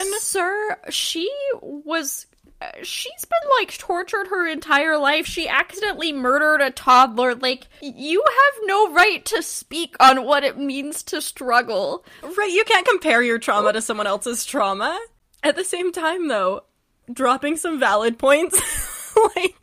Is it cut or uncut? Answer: uncut